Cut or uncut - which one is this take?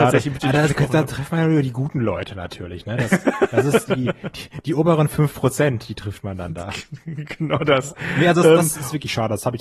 uncut